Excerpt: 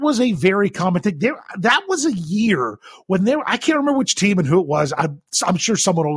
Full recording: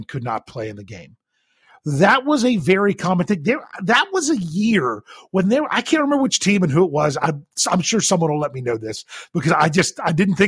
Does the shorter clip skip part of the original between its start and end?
no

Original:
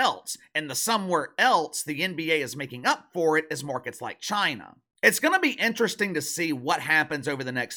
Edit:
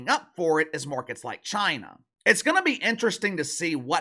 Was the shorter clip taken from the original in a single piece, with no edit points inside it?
yes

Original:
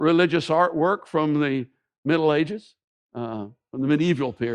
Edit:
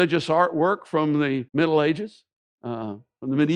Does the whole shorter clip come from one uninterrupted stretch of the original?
no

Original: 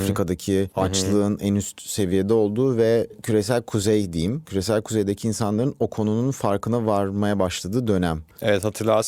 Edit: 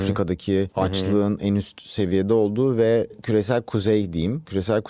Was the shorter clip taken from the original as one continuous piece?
yes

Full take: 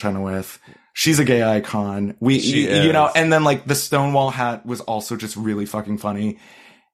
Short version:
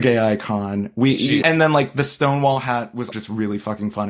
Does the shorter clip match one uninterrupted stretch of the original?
no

